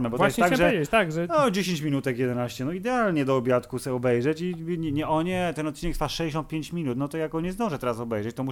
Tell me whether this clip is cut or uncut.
uncut